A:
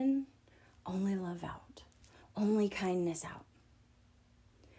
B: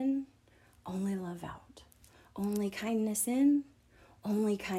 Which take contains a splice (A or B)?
A